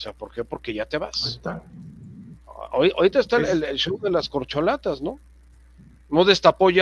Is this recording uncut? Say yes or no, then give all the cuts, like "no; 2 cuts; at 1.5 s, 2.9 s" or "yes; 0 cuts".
yes; 0 cuts